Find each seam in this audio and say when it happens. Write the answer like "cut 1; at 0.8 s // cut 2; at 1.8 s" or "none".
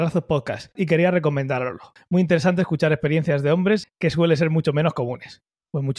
cut 1; at 2.0 s // cut 2; at 3.8 s